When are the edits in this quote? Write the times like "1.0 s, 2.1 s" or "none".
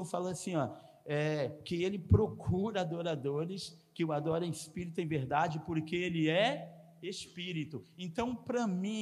none